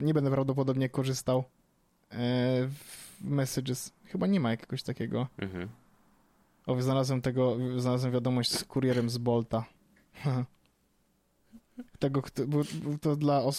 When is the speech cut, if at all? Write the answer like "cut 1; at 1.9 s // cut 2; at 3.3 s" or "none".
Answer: none